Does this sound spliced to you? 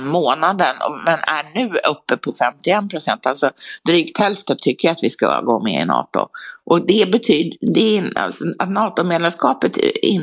no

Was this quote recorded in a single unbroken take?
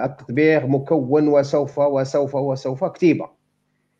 yes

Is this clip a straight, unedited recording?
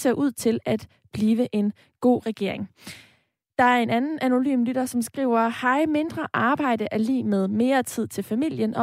yes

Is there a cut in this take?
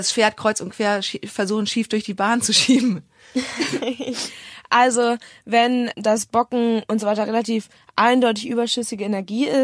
yes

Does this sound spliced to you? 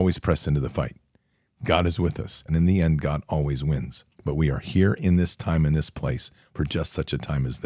yes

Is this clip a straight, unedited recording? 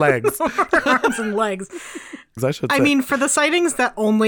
no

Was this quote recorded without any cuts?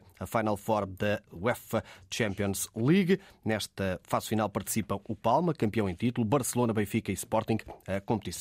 yes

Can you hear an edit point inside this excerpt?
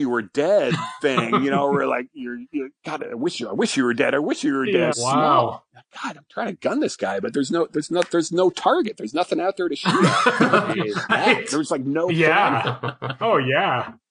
yes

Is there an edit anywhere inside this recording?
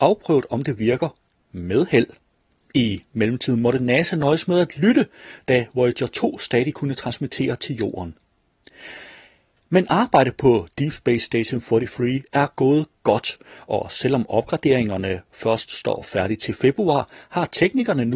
yes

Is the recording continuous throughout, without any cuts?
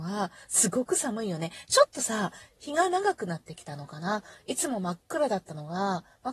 yes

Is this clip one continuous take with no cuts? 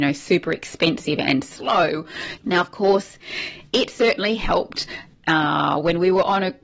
no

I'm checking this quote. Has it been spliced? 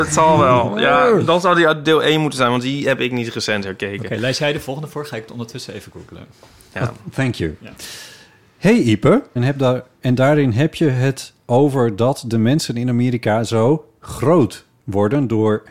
yes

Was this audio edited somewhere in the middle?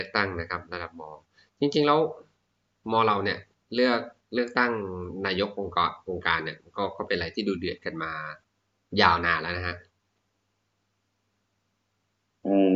no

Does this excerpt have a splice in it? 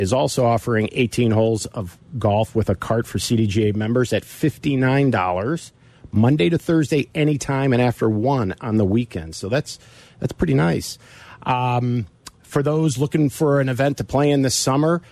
no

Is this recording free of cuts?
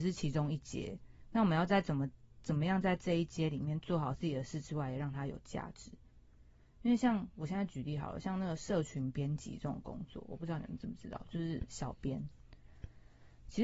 yes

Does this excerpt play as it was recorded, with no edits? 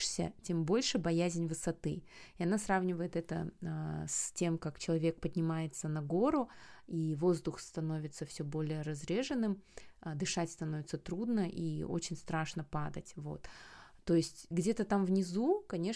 yes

